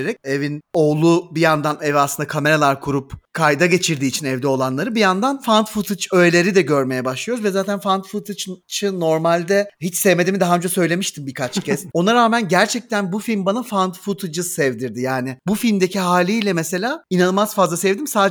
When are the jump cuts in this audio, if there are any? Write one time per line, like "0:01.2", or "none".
0:11.9